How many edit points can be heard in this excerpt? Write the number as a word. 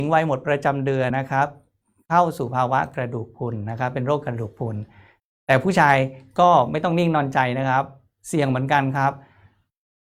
one